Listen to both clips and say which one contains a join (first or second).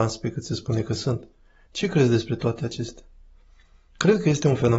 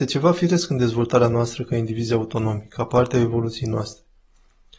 first